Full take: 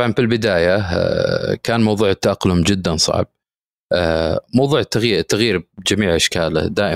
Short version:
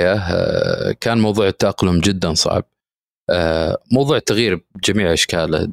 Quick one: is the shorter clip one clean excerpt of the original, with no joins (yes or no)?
no